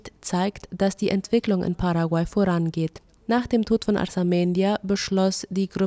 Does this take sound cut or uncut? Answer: cut